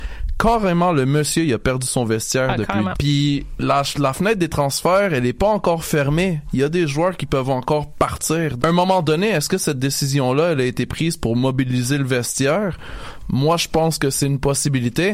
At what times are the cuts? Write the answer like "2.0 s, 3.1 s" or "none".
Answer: 2.9 s, 8.6 s